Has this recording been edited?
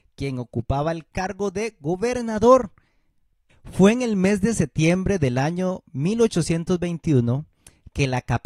yes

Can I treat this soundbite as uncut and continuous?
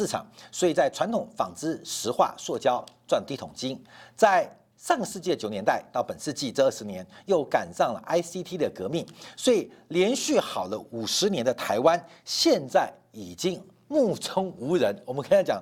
yes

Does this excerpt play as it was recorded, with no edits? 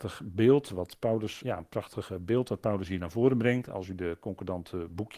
no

